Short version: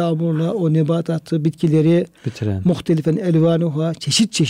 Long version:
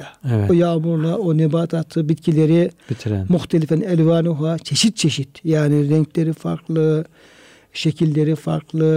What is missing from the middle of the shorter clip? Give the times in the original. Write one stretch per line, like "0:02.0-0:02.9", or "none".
none